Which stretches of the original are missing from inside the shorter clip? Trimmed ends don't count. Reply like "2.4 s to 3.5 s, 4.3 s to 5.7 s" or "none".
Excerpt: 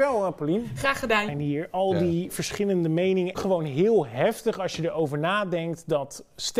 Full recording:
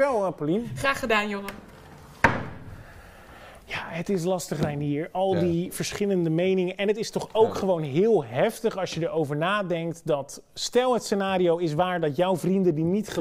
1.3 s to 4.7 s, 6.8 s to 7.5 s